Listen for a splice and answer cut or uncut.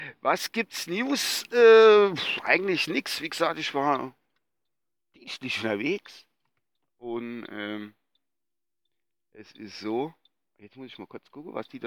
uncut